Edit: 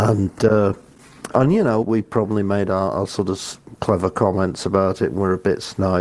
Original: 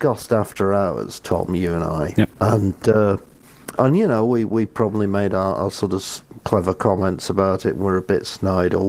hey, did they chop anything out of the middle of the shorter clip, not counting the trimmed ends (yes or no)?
yes